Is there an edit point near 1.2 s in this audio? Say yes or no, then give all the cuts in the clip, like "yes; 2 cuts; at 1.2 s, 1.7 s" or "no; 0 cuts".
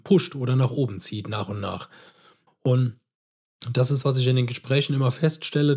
no; 2 cuts; at 2.5 s, 4.0 s